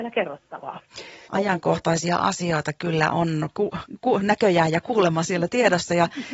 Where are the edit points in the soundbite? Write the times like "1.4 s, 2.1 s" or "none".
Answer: 1.2 s